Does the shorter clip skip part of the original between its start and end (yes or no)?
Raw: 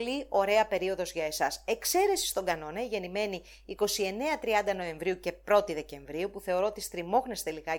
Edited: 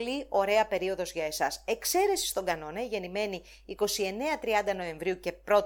no